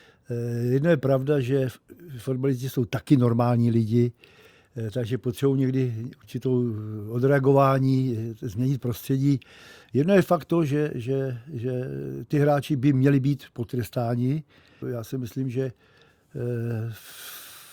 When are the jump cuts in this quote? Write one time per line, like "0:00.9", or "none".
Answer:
0:09.8
0:14.8